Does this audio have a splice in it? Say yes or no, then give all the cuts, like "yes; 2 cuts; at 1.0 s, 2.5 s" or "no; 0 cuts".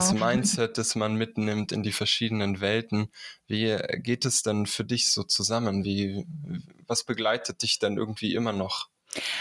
no; 0 cuts